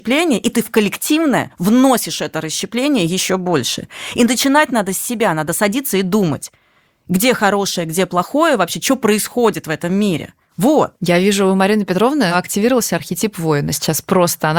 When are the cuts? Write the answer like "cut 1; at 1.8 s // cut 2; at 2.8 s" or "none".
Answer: none